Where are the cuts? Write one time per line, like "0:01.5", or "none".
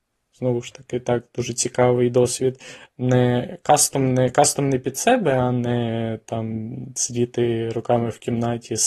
0:02.8